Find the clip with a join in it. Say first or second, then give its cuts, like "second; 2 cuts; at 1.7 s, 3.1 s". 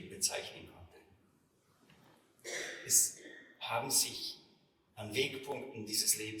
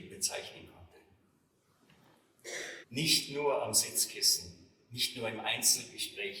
second; 1 cut; at 2.8 s